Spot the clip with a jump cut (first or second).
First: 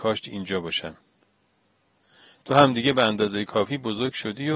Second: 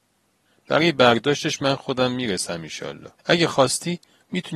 second